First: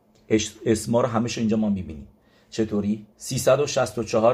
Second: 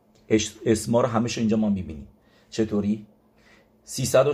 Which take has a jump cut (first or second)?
first